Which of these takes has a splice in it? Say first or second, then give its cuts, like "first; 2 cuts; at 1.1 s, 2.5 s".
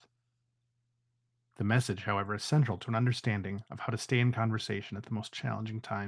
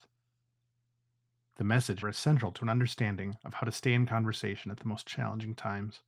second; 1 cut; at 2.0 s